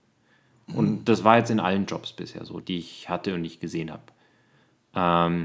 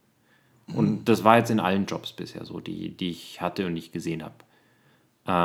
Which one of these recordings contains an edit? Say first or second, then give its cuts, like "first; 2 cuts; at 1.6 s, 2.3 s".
first; 1 cut; at 2.6 s